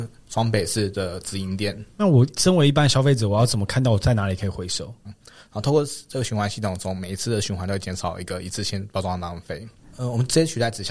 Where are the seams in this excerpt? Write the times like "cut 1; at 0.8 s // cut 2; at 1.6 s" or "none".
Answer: cut 1; at 5.0 s // cut 2; at 9.8 s

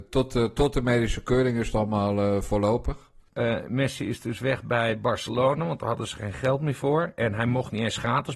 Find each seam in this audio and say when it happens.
cut 1; at 3.3 s

